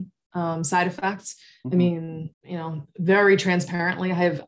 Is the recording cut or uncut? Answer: cut